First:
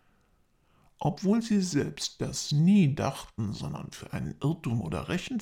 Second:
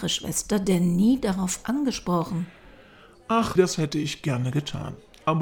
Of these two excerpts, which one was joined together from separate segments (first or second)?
second